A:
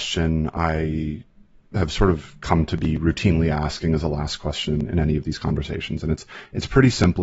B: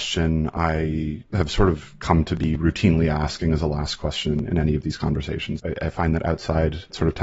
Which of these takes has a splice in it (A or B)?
B